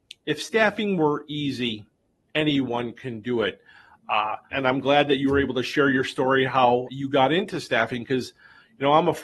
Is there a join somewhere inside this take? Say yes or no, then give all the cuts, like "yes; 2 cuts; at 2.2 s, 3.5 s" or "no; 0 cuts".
yes; 2 cuts; at 4.5 s, 6.9 s